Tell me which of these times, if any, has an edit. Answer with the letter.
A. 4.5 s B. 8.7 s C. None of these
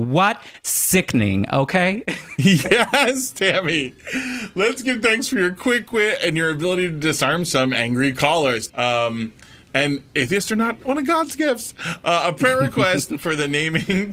B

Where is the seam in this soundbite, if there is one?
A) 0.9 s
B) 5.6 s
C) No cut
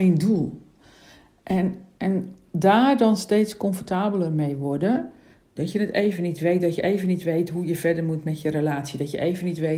B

